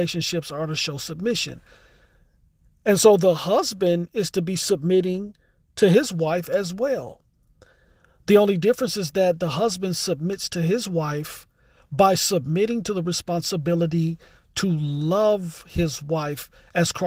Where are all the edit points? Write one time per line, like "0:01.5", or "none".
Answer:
none